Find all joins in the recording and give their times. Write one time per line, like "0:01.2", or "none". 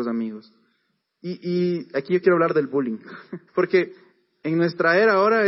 0:01.0
0:03.5